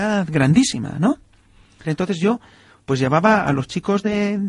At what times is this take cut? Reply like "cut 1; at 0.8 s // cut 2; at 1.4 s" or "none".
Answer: cut 1; at 1.8 s